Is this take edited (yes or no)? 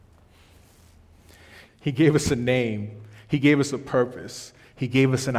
yes